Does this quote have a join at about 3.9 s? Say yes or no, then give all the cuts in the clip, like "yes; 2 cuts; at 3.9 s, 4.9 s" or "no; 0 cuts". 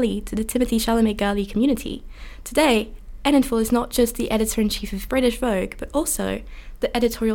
no; 1 cut; at 2.4 s